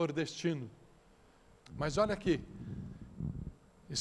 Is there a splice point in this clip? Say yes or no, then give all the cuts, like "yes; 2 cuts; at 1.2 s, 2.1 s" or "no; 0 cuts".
yes; 1 cut; at 1.6 s